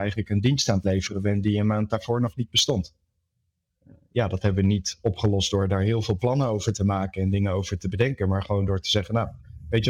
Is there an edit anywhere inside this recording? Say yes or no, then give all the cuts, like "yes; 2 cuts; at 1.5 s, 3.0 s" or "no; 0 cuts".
no; 0 cuts